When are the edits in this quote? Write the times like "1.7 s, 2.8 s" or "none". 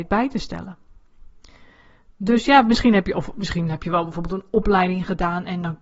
none